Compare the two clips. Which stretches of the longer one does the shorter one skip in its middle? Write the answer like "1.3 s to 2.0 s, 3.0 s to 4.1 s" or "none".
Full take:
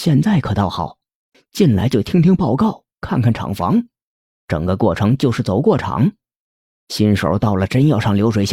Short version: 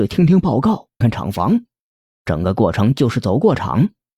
3.0 s to 3.2 s